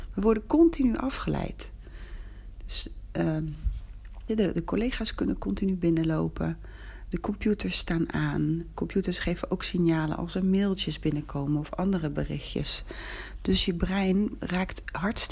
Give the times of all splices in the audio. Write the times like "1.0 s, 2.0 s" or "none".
4.3 s, 7.1 s